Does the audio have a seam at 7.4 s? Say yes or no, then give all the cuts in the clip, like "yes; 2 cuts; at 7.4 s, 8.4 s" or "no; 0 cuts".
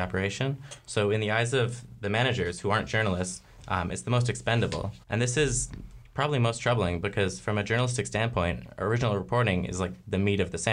no; 1 cut; at 5.0 s